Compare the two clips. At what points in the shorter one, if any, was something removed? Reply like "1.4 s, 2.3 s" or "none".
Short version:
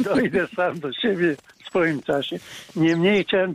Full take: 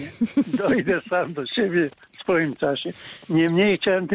none